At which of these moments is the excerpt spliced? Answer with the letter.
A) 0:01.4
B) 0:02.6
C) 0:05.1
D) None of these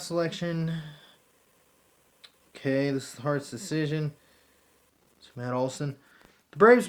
D